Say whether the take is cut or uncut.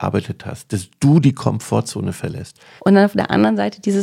cut